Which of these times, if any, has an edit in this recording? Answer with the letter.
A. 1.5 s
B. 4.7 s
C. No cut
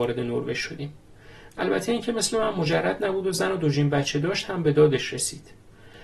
A